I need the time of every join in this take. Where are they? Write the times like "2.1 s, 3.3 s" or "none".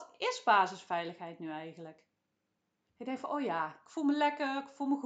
2.9 s